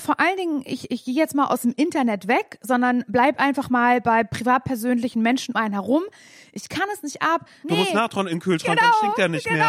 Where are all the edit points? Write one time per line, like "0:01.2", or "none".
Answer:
0:05.5
0:07.6

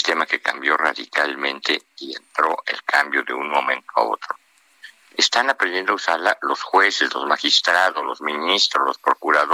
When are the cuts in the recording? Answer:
none

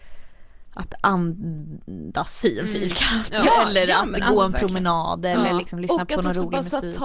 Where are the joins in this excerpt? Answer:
none

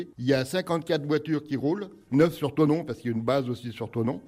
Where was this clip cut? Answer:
0:02.1

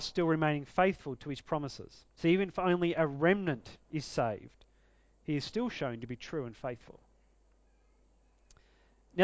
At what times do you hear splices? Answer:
0:02.1

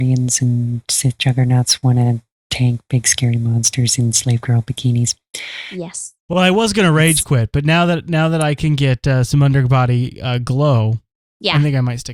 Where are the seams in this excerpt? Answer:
none

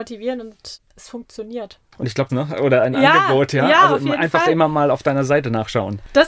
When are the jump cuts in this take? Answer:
0:02.3

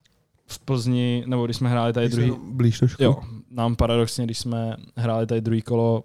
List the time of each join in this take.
none

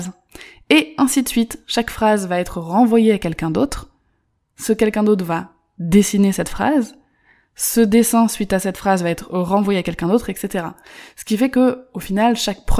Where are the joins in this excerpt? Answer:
none

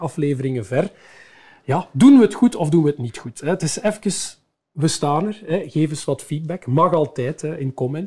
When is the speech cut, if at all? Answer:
none

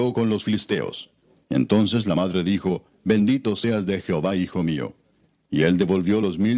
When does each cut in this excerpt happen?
0:01.5

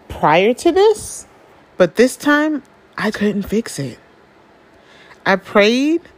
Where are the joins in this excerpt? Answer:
0:01.6
0:03.1

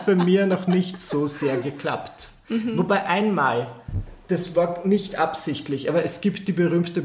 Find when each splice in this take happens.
none

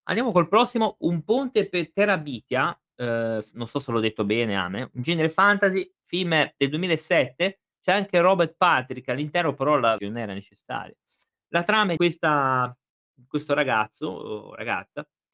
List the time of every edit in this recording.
0:10.0
0:12.0

